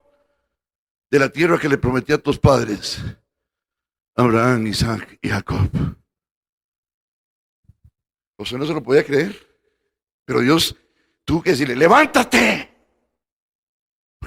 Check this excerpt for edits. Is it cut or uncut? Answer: uncut